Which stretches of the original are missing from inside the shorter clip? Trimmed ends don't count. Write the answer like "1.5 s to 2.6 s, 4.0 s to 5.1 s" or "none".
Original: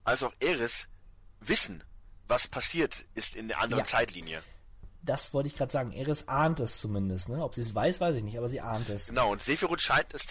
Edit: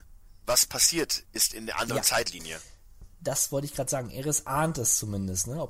none